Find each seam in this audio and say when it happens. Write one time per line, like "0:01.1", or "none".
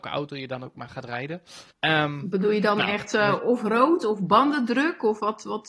0:01.7